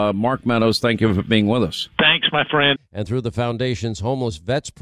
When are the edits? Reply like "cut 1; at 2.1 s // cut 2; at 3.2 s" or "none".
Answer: cut 1; at 2.8 s